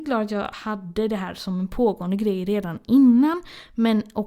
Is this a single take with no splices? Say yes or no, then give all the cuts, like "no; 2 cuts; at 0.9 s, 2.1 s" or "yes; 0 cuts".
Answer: yes; 0 cuts